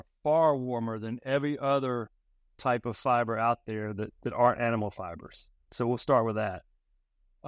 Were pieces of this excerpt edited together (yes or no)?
no